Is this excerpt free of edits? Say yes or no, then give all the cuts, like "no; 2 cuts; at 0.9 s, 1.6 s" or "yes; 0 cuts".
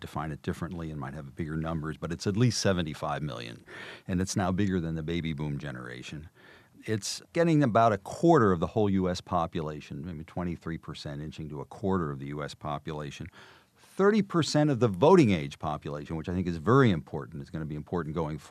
yes; 0 cuts